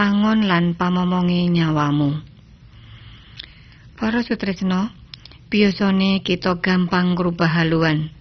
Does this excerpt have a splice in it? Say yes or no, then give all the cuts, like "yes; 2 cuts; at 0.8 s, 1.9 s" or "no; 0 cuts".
no; 0 cuts